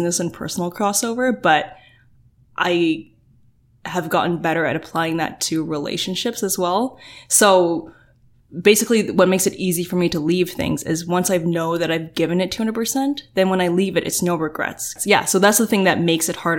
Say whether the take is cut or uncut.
uncut